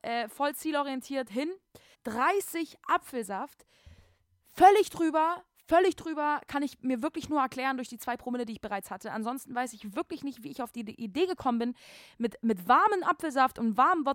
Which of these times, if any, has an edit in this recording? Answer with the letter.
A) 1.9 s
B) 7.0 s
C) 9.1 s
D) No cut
A